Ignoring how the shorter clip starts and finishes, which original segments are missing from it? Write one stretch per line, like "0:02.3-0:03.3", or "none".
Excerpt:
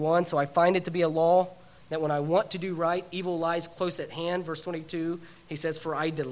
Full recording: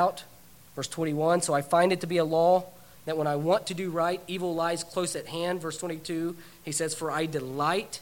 none